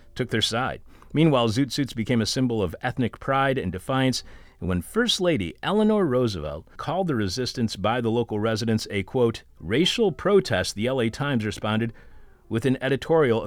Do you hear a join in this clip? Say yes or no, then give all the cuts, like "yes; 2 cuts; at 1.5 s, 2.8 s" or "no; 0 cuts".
yes; 2 cuts; at 6.7 s, 9.5 s